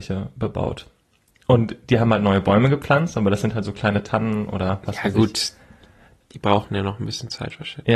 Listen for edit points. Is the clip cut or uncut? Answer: uncut